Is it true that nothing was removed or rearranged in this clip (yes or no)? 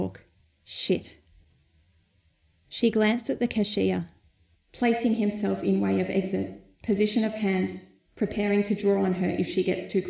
no